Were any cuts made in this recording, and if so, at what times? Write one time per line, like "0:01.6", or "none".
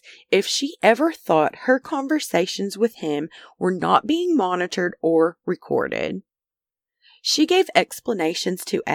none